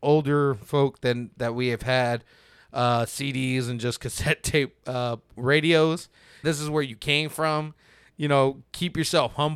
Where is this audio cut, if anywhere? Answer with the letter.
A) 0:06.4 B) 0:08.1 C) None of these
A